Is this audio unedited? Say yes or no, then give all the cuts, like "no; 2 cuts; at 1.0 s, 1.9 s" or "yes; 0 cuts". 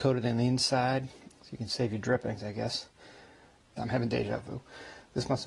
no; 2 cuts; at 1.3 s, 3.8 s